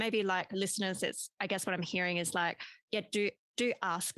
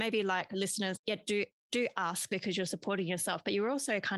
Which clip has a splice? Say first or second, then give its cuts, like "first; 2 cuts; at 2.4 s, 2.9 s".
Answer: second; 1 cut; at 1.0 s